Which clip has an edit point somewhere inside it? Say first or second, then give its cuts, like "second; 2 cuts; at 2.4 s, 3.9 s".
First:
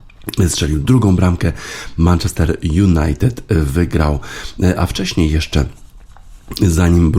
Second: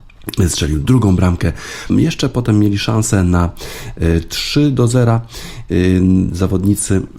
second; 1 cut; at 1.9 s